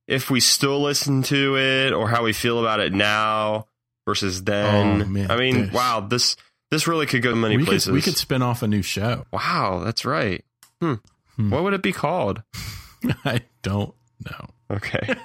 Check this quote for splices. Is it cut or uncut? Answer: cut